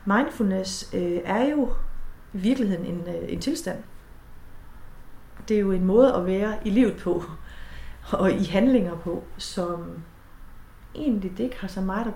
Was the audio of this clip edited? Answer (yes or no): no